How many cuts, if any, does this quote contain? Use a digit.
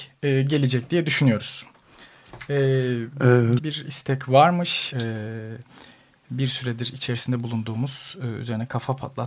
2